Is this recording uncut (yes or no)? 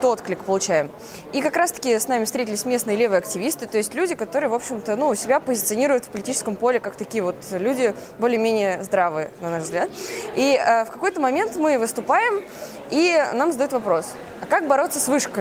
yes